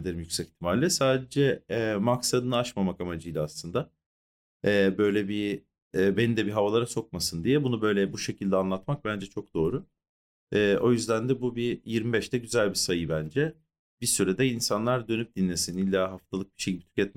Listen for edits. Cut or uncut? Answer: uncut